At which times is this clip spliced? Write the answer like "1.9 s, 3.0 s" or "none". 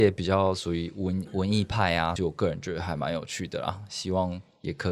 2.2 s